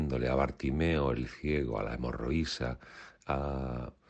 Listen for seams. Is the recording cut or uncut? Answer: uncut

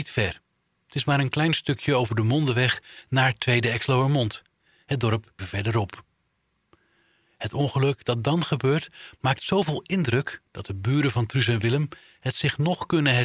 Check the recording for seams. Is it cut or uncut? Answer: cut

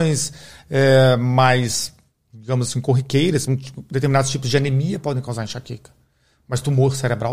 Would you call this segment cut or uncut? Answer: cut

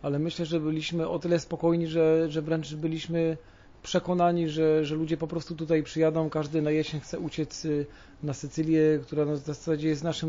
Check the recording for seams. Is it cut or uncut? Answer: uncut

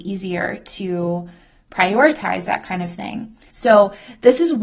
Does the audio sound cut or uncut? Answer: cut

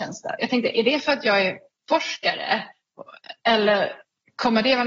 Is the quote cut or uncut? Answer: uncut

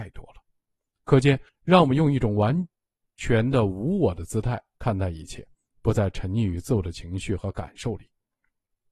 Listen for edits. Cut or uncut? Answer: cut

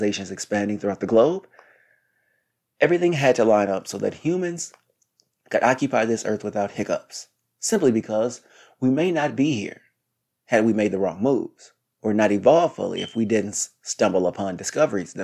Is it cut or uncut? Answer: uncut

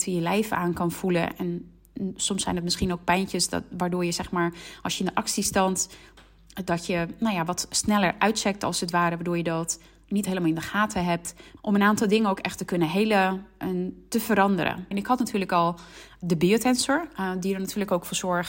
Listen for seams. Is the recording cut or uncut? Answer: cut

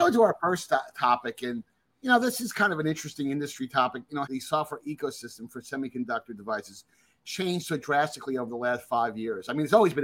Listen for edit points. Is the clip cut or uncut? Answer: cut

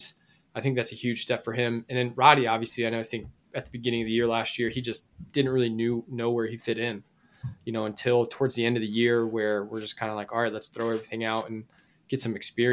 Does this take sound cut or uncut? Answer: uncut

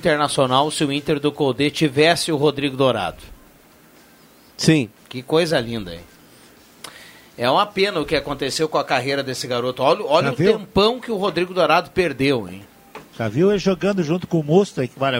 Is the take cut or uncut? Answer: uncut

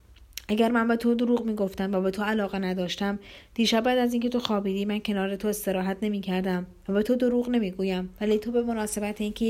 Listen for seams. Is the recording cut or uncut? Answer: uncut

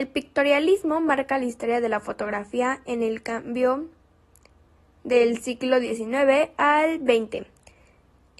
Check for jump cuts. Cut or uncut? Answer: uncut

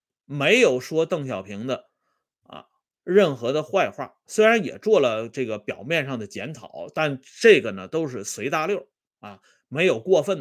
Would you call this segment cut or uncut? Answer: uncut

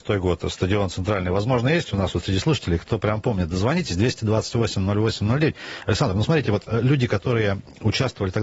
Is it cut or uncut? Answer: uncut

